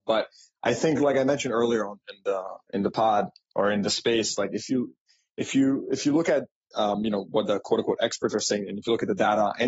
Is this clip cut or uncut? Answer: uncut